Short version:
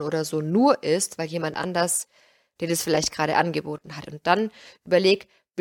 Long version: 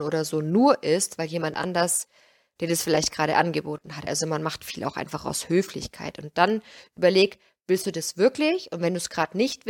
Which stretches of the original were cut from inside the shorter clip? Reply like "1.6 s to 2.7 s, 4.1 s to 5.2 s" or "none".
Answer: 4.0 s to 6.1 s